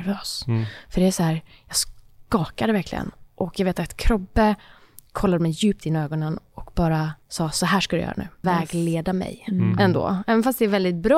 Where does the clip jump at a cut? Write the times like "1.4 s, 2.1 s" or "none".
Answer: 7.2 s, 8.4 s, 9.8 s